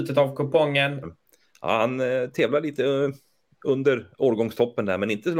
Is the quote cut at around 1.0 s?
yes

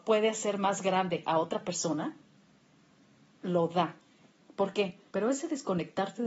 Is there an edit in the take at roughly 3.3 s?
no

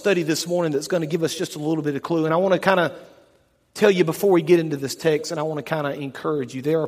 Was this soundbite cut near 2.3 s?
no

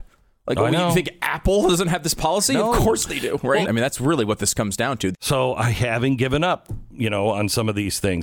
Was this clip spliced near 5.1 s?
yes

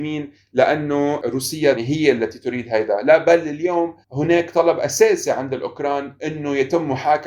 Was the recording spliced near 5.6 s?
no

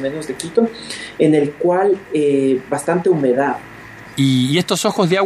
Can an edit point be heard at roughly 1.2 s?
no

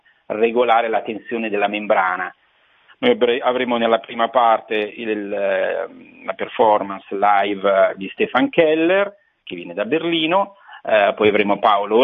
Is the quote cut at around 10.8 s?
no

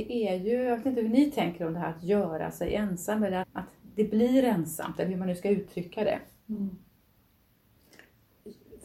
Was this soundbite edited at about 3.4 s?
yes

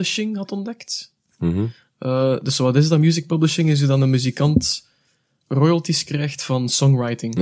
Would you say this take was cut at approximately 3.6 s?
no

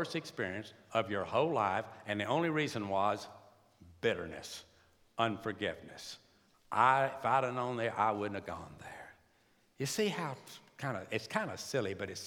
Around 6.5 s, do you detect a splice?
no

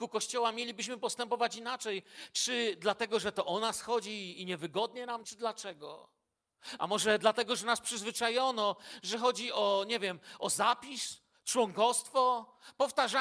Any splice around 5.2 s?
yes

